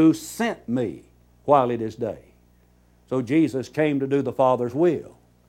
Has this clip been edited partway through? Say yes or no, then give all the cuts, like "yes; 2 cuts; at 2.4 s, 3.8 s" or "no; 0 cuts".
no; 0 cuts